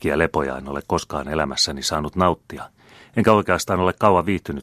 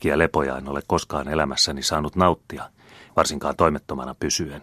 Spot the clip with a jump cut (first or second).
second